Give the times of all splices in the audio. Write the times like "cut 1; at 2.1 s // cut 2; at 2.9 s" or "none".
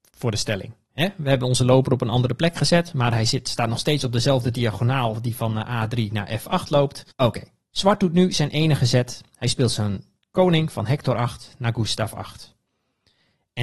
cut 1; at 7.1 s